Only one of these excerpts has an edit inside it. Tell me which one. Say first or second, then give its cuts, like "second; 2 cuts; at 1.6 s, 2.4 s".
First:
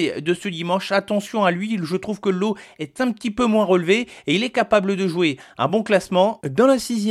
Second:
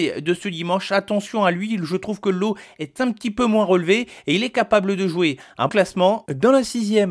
second; 1 cut; at 5.7 s